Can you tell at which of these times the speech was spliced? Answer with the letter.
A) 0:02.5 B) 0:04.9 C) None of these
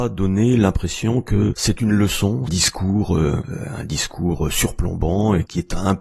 A